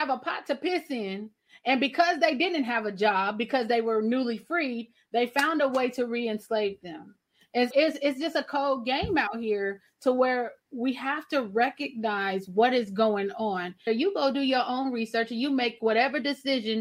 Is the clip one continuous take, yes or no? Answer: no